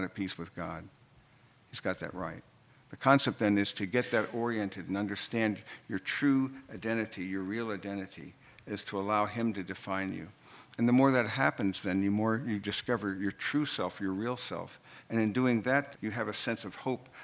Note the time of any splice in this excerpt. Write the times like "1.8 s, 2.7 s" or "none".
15.9 s